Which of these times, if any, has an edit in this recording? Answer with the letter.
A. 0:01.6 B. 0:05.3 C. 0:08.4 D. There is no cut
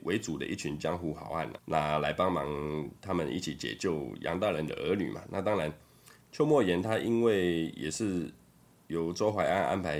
A